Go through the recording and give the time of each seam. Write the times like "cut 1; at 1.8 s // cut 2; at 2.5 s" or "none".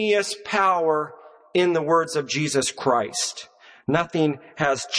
none